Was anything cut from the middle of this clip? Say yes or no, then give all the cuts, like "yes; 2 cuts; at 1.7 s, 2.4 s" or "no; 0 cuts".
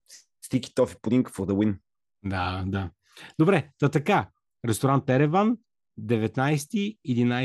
no; 0 cuts